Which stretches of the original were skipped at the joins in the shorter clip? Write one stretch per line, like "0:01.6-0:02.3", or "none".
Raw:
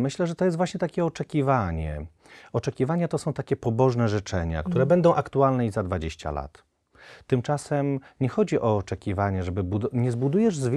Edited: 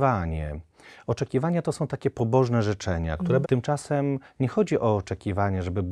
0:04.9-0:07.2